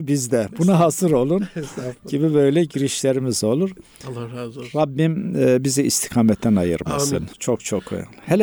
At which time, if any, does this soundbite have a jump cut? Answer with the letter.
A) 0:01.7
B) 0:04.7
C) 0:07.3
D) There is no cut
C